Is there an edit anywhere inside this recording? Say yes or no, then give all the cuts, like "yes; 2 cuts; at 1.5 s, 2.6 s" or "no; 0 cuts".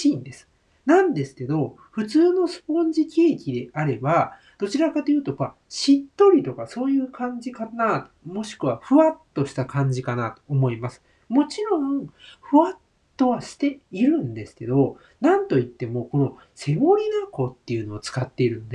no; 0 cuts